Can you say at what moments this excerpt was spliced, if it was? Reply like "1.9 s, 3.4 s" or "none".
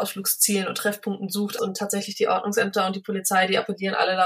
1.6 s